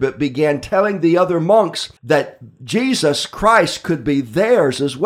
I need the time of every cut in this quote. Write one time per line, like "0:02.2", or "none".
0:02.0